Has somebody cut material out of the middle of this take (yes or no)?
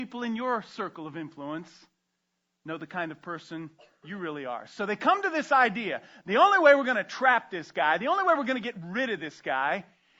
no